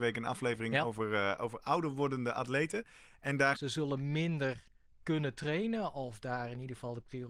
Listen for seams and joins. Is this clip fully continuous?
no; 1 cut; at 3.5 s

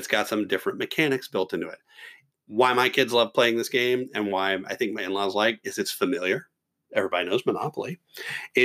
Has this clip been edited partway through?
no; 0 cuts

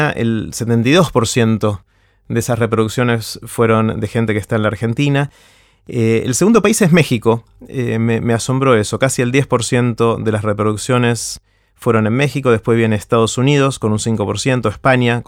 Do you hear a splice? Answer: no; 0 cuts

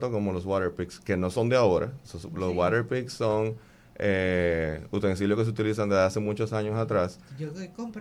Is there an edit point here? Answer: no; 0 cuts

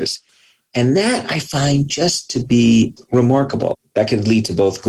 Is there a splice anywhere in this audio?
no; 0 cuts

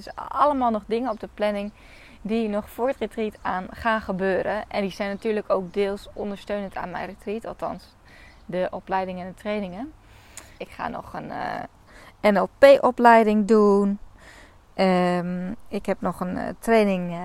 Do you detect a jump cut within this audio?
yes; 1 cut; at 10.6 s

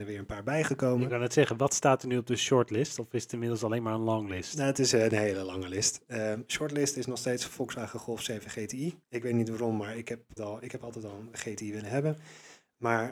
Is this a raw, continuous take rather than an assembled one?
no; 2 cuts; at 9.0 s, 10.4 s

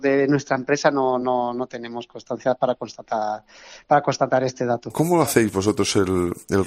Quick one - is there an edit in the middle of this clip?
no; 0 cuts

